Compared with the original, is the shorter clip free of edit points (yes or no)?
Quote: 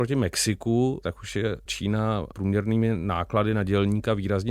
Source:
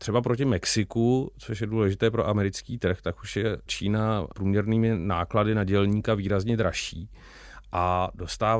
no